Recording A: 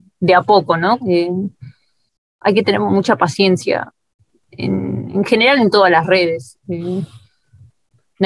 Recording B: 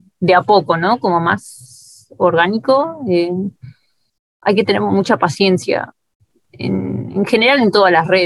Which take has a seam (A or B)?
A